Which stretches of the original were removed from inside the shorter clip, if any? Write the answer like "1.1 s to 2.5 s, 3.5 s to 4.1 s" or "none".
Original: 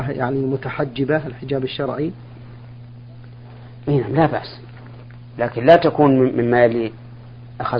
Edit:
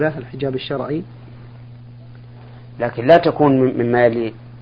3.8 s to 5.3 s